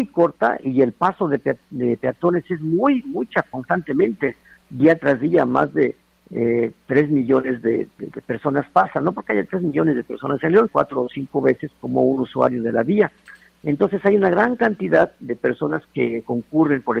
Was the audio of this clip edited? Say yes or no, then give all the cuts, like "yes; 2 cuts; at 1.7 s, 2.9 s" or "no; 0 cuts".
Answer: yes; 2 cuts; at 8.0 s, 10.7 s